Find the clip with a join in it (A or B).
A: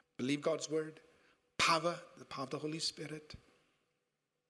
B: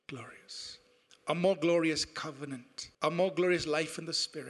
B